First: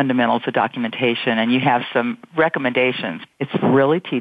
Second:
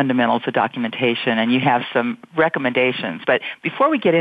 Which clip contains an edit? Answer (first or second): first